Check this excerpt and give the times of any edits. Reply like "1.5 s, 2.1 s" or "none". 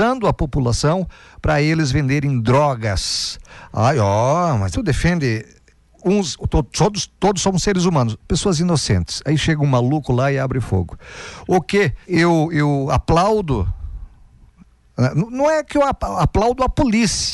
4.7 s, 8.2 s, 12.0 s